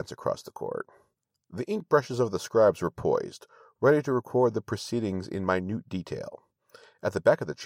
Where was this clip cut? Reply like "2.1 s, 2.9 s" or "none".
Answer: none